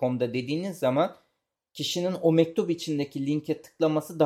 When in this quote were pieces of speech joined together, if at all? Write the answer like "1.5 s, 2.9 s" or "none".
none